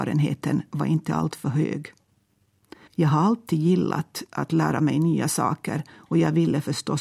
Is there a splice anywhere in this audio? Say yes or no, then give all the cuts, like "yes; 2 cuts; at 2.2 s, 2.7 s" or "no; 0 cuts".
yes; 1 cut; at 2.9 s